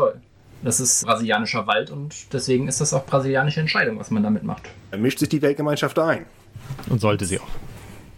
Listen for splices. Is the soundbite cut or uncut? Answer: cut